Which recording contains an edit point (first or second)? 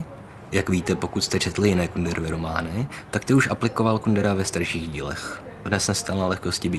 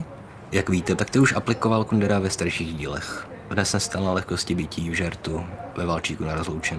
second